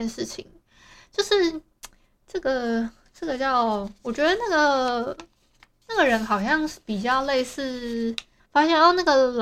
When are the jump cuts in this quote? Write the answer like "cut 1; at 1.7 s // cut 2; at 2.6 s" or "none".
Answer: cut 1; at 8.4 s